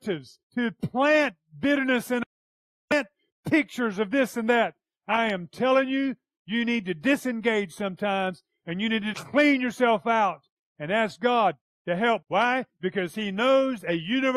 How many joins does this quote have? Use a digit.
2